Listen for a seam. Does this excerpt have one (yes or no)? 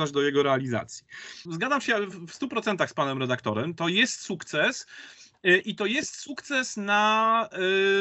yes